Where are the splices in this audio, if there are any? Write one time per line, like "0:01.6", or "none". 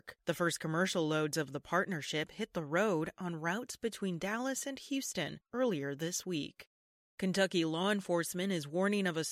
none